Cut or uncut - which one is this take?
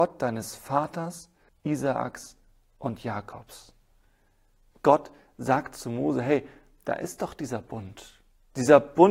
cut